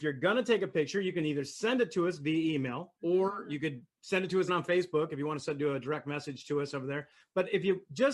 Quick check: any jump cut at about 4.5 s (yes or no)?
yes